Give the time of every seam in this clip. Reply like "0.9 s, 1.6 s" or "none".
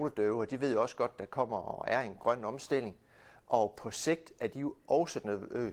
none